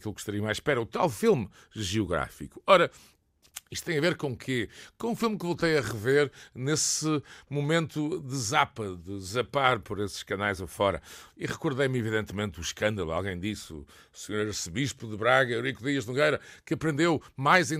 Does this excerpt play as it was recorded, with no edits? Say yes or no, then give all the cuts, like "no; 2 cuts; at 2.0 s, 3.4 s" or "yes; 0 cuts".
yes; 0 cuts